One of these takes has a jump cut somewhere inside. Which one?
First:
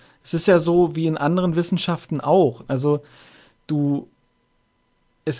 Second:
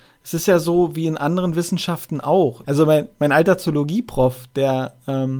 second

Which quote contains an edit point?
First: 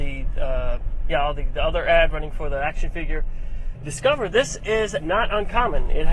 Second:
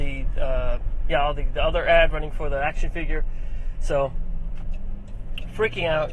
first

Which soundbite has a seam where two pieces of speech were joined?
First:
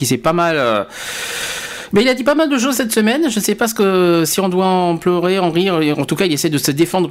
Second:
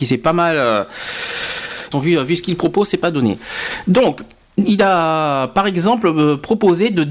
second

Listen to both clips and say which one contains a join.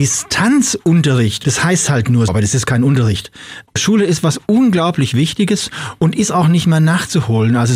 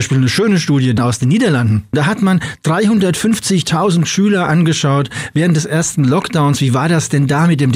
first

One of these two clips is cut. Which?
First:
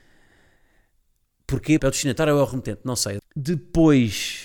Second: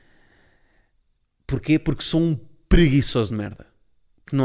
first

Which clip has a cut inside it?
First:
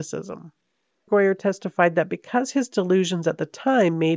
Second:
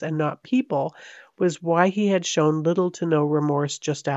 first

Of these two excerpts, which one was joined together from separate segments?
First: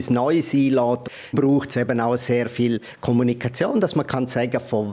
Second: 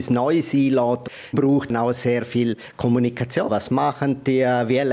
second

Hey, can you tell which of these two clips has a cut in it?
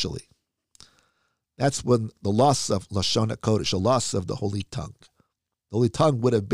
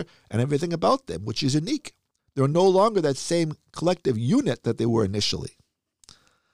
second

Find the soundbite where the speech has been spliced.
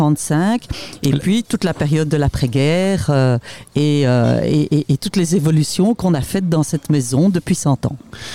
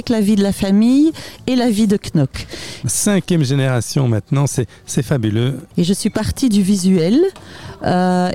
second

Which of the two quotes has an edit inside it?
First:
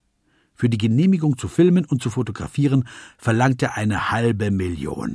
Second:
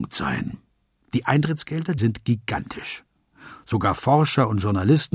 second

